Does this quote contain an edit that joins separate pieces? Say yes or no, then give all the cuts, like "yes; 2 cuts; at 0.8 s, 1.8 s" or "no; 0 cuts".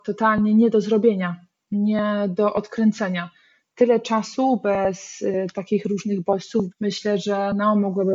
yes; 1 cut; at 6.7 s